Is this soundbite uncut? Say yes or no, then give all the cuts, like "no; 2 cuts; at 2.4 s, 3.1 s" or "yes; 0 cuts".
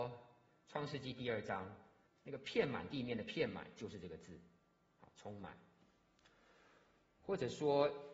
no; 1 cut; at 2.1 s